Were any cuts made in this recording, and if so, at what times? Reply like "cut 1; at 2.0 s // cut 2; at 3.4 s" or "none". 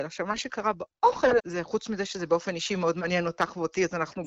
cut 1; at 1.4 s